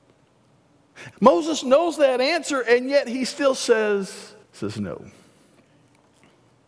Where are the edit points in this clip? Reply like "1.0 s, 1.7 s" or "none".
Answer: 1.1 s, 4.4 s